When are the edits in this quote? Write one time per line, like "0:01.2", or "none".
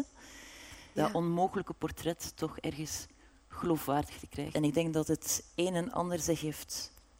0:01.0
0:04.5